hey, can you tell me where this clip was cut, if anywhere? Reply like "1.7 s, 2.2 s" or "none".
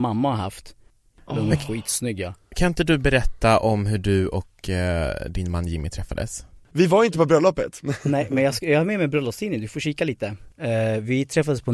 none